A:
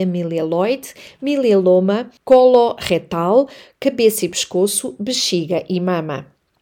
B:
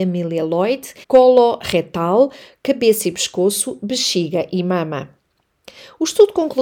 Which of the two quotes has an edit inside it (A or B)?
B